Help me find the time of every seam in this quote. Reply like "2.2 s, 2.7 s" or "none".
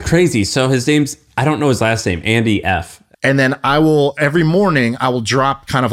3.1 s